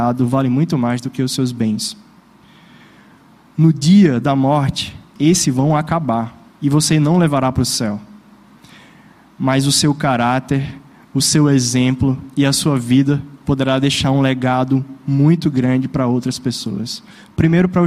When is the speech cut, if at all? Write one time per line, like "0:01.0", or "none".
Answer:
0:05.2
0:06.5